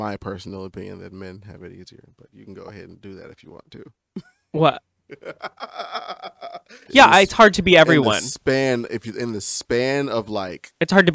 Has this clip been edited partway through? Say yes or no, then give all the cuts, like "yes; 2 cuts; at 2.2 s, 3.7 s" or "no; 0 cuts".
yes; 1 cut; at 6.9 s